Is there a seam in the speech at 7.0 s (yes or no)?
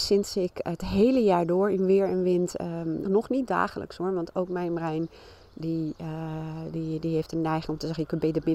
no